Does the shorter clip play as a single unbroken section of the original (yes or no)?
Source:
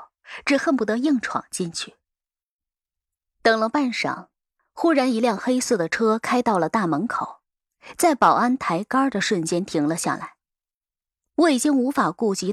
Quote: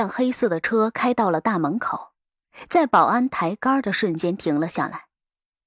yes